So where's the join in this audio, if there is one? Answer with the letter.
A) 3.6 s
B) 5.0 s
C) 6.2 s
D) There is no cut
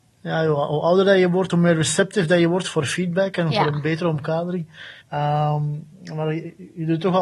B